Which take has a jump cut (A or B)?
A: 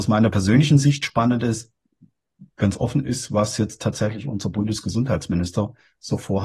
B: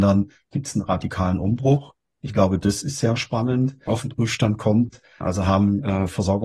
B